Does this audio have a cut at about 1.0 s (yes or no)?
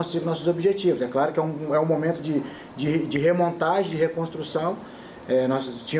no